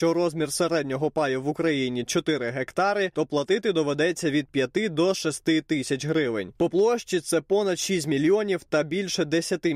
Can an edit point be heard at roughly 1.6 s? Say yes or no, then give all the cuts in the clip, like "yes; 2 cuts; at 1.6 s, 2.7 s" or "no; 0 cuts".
no; 1 cut; at 6.6 s